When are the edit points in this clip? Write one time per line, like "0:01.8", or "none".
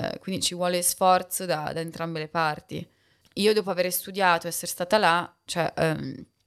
none